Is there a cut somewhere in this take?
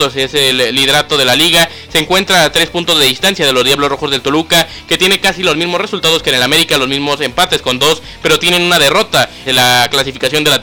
yes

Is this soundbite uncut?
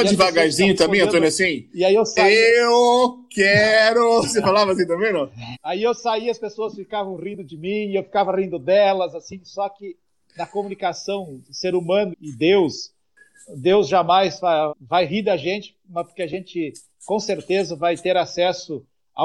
no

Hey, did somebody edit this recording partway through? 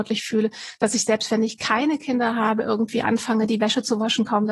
no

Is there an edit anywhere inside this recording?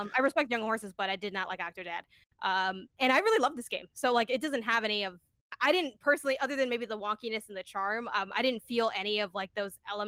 no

